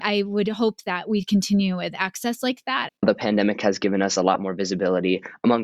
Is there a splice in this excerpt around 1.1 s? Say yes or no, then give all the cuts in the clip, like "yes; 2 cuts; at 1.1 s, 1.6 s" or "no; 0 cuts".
no; 1 cut; at 2.9 s